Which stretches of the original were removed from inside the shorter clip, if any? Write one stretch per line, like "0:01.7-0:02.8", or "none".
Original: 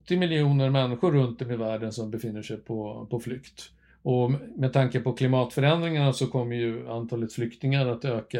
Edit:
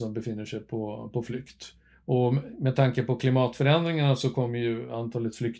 none